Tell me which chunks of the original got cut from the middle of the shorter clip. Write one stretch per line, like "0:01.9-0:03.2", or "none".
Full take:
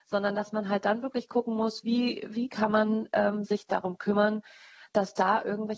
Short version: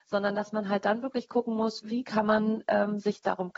0:01.8-0:02.3